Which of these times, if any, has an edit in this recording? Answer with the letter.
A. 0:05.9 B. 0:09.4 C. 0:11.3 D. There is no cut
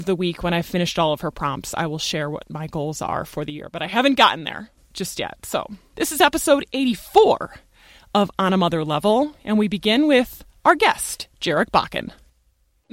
A